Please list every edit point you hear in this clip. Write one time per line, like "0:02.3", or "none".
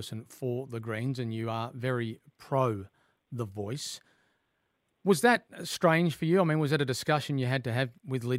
none